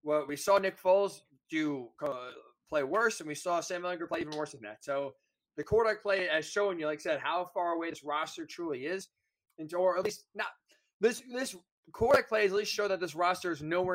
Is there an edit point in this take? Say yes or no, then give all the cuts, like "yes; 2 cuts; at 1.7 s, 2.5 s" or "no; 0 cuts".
no; 0 cuts